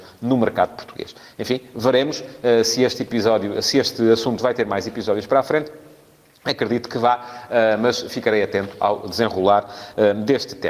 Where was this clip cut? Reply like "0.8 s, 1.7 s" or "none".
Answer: none